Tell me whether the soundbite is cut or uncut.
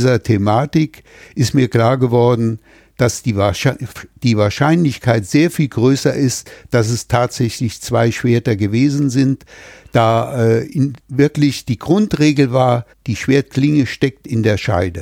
cut